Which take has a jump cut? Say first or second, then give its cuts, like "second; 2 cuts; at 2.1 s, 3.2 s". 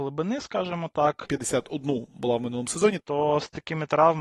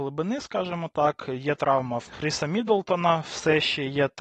first; 2 cuts; at 1.2 s, 3.0 s